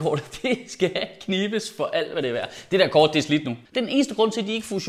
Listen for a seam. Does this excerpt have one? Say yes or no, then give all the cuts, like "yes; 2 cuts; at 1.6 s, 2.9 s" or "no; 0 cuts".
yes; 1 cut; at 3.6 s